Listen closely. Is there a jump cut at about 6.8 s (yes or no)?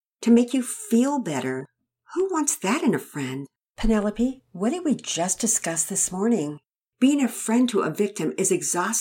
yes